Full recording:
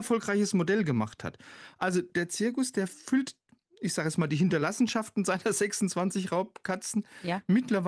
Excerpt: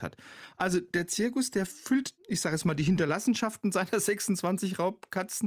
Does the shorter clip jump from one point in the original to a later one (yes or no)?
yes